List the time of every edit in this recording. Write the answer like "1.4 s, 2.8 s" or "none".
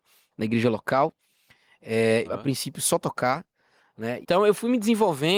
2.2 s, 4.2 s